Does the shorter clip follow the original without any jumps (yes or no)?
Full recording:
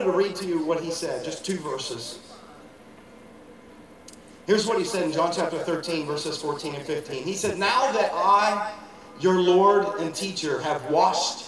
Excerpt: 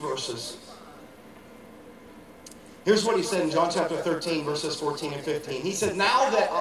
yes